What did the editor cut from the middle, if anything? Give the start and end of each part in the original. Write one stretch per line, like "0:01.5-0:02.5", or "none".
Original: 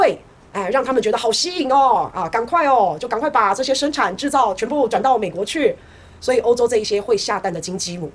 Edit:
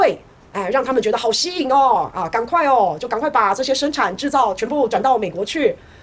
none